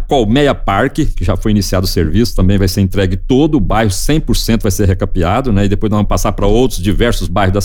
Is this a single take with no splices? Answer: yes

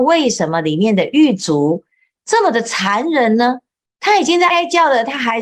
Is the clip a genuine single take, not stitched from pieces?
no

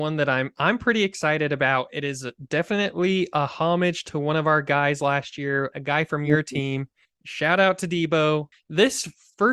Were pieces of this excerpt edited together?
yes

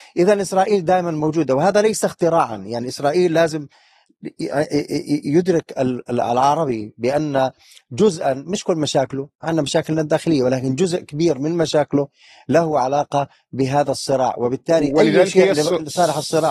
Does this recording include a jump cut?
no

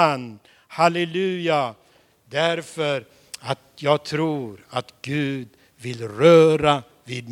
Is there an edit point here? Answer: no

